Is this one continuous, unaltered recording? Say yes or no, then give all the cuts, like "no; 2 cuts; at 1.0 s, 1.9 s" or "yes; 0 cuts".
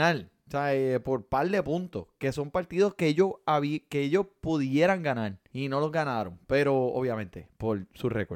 no; 1 cut; at 5.5 s